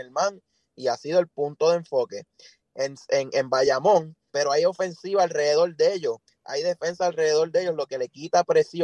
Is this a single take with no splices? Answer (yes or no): no